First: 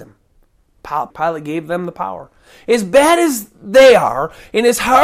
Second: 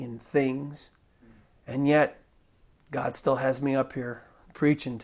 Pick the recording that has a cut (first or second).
first